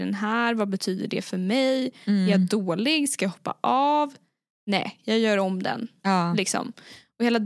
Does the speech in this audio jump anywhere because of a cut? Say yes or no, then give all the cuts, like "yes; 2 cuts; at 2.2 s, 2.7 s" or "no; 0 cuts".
no; 0 cuts